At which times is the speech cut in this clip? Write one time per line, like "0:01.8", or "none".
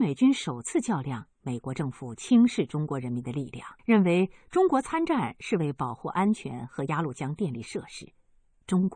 0:01.3
0:03.8